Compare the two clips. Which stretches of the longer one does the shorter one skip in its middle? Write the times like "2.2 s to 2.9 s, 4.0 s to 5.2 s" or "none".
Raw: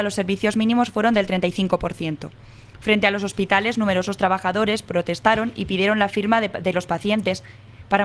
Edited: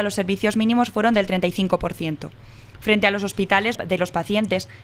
3.7 s to 6.5 s